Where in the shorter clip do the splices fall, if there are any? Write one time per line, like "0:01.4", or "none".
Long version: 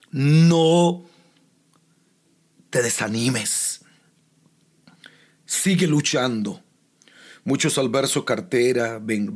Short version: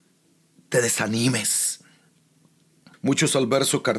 0:02.9